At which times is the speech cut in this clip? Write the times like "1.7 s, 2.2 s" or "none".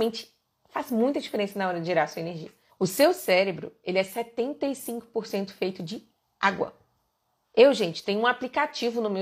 2.7 s, 7.4 s